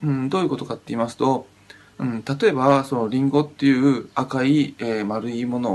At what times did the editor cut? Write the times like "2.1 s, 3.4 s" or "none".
none